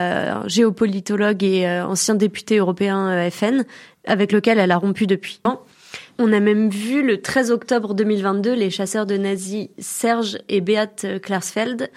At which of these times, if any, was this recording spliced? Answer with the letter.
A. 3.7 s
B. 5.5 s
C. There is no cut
B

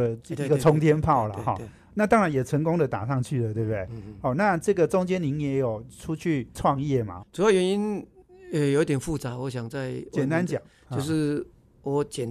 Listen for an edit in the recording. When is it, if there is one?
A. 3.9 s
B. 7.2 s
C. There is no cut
B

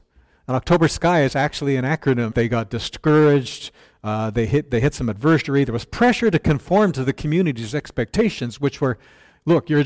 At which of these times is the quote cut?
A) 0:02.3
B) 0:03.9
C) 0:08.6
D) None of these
A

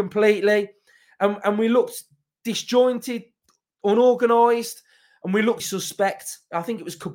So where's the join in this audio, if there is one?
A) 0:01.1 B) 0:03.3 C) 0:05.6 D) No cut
C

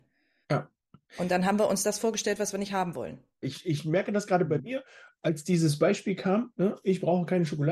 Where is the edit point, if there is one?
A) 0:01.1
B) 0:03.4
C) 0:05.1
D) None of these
B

